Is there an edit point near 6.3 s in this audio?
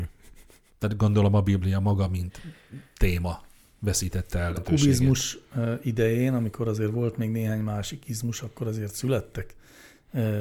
no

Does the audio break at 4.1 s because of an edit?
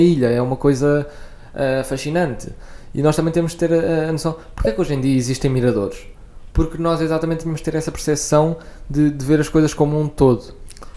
no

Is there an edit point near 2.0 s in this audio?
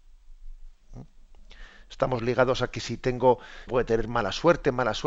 no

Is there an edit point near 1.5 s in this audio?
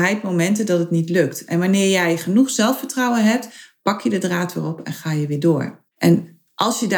no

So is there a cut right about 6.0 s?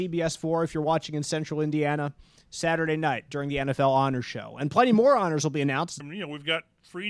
yes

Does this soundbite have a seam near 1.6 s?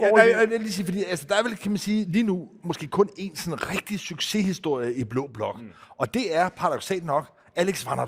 no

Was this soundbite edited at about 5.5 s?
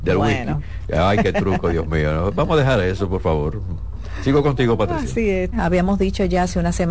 yes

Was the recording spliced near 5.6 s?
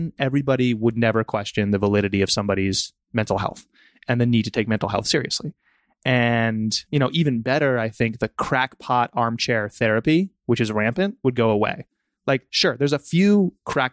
no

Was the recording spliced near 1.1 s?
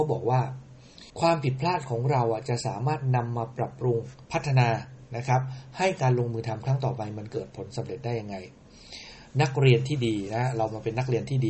yes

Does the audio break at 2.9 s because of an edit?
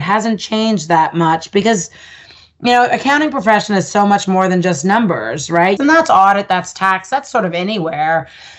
no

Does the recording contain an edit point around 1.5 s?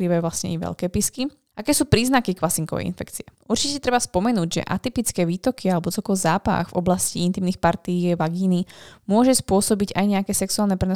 yes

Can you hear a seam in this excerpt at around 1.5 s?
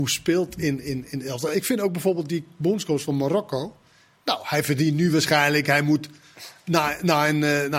no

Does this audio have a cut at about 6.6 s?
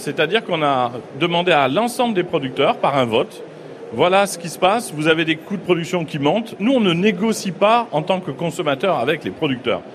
no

